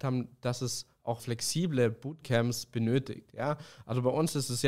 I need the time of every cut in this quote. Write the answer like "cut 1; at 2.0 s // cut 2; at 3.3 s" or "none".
cut 1; at 1.2 s